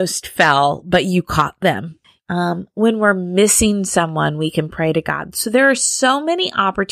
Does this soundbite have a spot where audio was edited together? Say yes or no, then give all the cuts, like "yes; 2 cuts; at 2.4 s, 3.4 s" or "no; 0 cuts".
yes; 1 cut; at 2.2 s